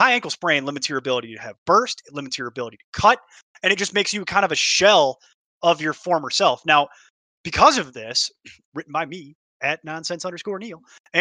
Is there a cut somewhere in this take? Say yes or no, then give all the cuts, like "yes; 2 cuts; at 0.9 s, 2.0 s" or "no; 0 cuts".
yes; 1 cut; at 8.6 s